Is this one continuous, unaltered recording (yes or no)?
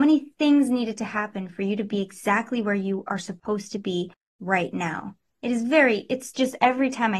yes